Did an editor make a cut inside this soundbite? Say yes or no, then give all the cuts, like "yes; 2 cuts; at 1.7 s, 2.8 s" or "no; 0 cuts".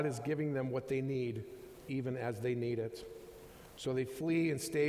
no; 0 cuts